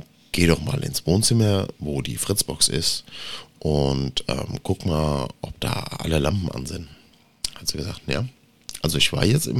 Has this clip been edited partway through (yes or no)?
no